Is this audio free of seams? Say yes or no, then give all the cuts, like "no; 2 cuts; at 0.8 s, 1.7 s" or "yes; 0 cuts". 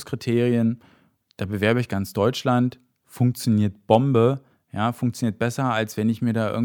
yes; 0 cuts